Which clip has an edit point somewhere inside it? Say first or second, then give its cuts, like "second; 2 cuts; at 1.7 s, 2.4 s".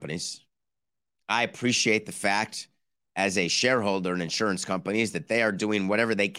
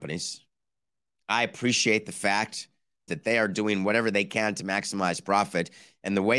second; 1 cut; at 3.1 s